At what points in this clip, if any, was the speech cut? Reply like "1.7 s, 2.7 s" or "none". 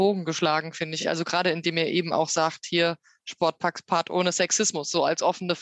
none